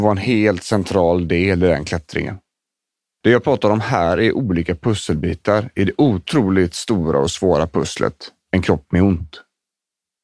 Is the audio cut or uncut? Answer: cut